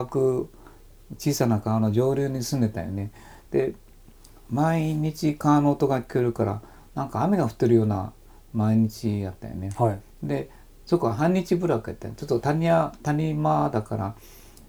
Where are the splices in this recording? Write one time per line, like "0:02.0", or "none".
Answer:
none